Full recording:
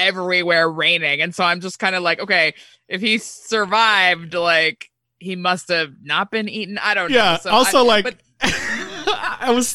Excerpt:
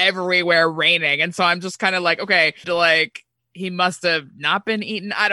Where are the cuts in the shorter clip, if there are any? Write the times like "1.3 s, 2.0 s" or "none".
2.6 s